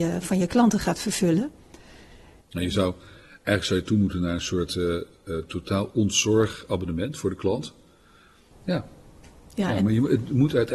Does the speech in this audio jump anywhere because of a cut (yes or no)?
yes